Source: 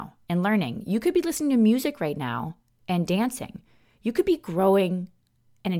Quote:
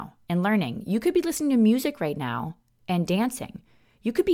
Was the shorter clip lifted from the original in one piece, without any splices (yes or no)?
yes